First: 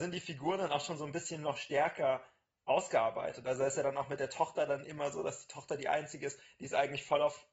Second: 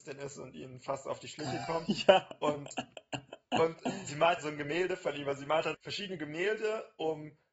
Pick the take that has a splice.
second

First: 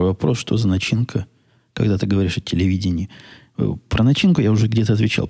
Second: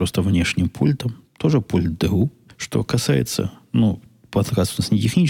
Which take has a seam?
second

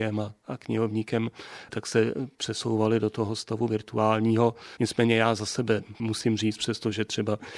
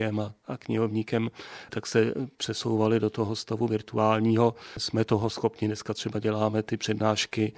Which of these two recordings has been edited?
first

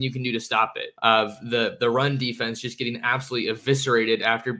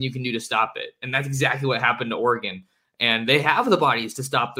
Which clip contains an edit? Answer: first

